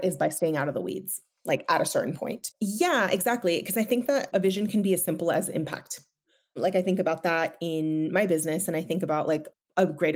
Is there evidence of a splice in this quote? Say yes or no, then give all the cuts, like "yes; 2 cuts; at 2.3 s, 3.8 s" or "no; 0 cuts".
yes; 1 cut; at 2.5 s